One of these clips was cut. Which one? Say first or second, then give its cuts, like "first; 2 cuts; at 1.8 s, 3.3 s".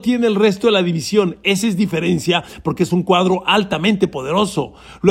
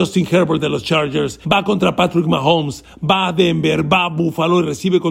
second; 1 cut; at 1.4 s